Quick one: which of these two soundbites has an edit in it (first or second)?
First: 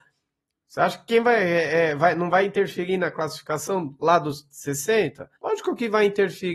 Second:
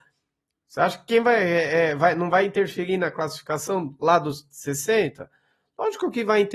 first